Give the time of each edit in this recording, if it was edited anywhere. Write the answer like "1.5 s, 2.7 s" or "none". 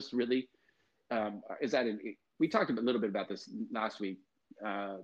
none